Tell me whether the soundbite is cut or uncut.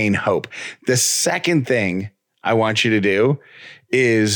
uncut